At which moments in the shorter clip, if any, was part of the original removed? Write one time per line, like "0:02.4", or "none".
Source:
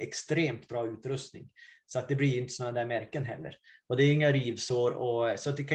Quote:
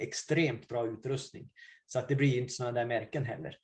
none